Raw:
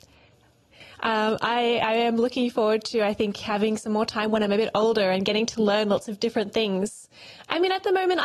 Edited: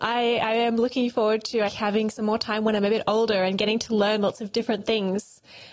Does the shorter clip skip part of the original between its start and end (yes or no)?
yes